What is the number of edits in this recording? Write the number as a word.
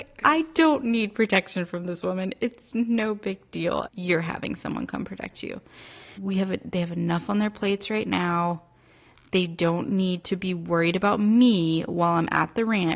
two